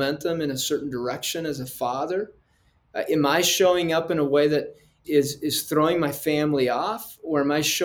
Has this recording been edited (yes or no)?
yes